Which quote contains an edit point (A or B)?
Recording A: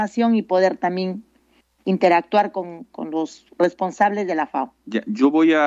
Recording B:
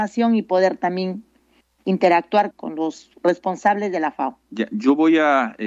B